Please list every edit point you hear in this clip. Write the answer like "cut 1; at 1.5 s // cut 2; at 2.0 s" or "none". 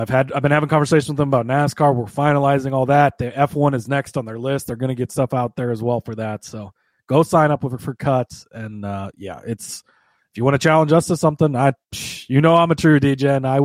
none